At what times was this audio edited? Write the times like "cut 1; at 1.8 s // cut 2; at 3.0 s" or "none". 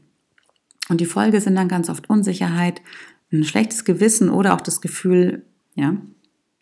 cut 1; at 3.1 s // cut 2; at 5.6 s